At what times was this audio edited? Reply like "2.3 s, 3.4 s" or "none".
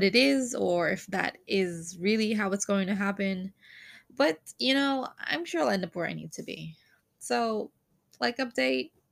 none